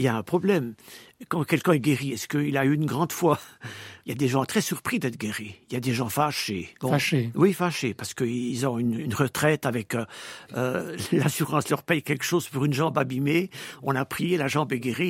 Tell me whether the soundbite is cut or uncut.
uncut